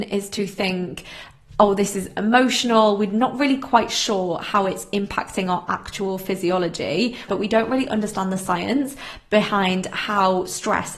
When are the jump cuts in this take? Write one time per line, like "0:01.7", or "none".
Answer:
0:07.3